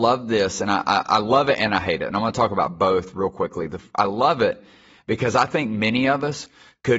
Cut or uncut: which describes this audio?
uncut